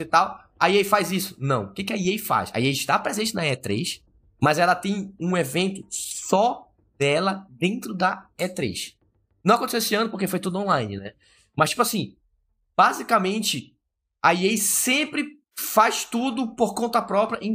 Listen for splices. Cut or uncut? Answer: uncut